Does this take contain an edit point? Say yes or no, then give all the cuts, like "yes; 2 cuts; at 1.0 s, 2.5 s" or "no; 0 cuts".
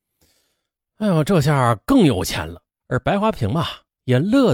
yes; 1 cut; at 2.8 s